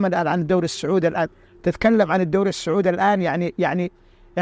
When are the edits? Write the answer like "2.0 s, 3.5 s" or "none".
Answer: none